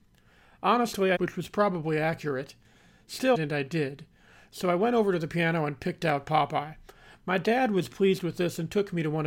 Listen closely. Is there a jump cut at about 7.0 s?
no; 2 cuts; at 1.2 s, 3.3 s

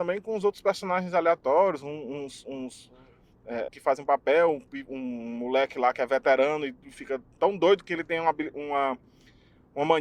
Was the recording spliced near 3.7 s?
yes; 1 cut; at 3.7 s

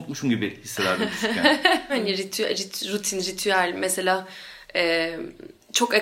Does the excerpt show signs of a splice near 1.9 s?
yes; 1 cut; at 1.9 s

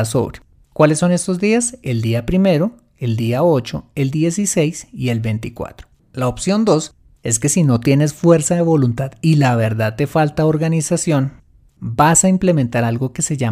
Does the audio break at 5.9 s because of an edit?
yes; 1 cut; at 5.9 s

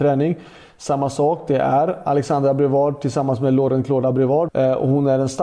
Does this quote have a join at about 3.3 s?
no; 1 cut; at 4.5 s

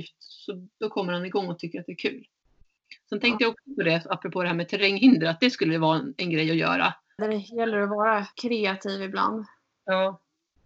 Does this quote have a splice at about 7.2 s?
yes; 2 cuts; at 7.2 s, 8.3 s

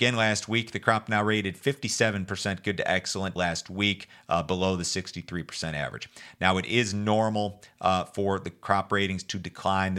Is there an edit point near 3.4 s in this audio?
yes; 1 cut; at 3.4 s

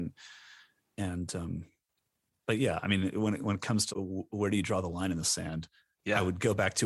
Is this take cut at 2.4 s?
no; 1 cut; at 3.9 s

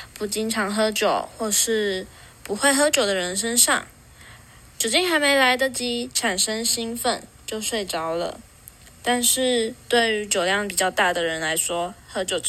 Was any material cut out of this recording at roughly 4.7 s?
no; 0 cuts

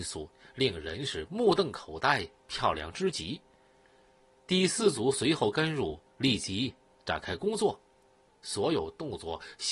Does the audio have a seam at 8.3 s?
yes; 1 cut; at 8.3 s

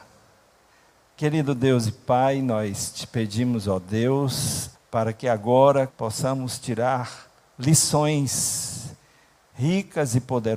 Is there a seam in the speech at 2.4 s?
no; 2 cuts; at 4.7 s, 5.9 s

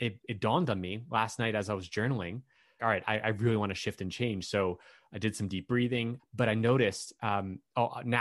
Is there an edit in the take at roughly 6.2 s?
yes; 2 cuts; at 2.8 s, 6.2 s

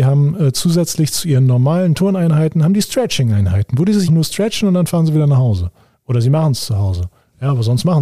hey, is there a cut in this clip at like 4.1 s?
yes; 1 cut; at 4.1 s

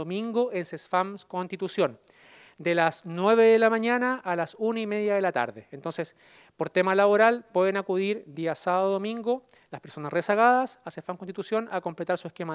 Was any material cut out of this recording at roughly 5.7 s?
no; 0 cuts

